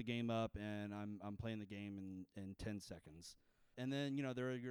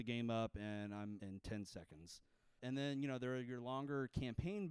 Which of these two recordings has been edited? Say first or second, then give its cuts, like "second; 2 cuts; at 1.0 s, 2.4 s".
second; 1 cut; at 1.2 s